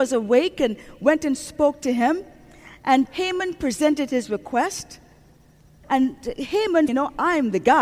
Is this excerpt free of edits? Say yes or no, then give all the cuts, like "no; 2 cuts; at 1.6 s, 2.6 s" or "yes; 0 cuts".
no; 3 cuts; at 3.0 s, 5.8 s, 6.9 s